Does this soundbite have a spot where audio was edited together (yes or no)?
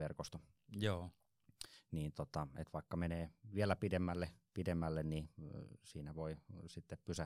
no